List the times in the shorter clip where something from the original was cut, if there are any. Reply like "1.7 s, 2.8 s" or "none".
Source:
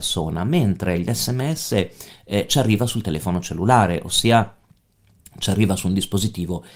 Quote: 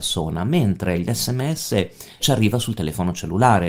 2.2 s